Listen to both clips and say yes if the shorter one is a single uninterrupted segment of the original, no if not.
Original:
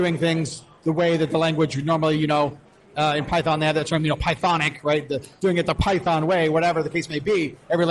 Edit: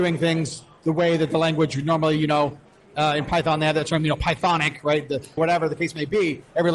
no